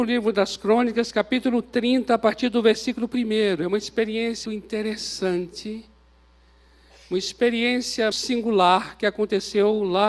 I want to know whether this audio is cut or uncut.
cut